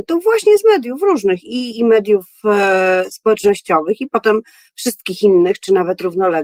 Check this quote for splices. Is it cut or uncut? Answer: cut